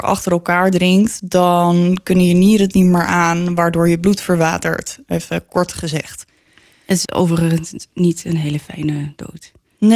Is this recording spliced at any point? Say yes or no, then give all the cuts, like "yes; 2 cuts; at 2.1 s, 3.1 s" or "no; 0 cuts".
yes; 1 cut; at 7.0 s